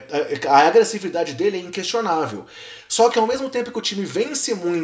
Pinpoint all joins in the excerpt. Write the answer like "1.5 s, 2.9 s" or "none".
none